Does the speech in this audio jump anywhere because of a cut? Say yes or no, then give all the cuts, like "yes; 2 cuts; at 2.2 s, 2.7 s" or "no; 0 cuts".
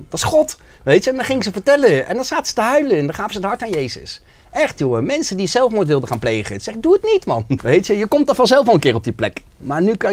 yes; 1 cut; at 7.6 s